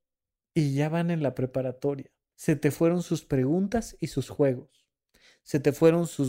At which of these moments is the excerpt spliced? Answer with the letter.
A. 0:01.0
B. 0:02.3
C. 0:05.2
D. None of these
B